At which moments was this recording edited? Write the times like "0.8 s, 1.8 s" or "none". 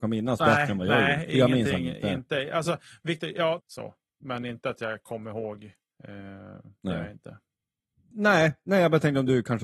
3.6 s, 6.0 s, 8.1 s